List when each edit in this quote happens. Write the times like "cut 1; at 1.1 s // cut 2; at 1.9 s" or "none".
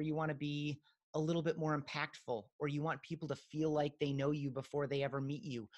none